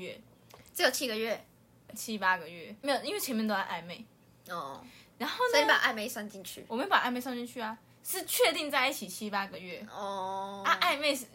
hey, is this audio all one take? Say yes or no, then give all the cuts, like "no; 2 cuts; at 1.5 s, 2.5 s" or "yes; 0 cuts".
no; 1 cut; at 1.9 s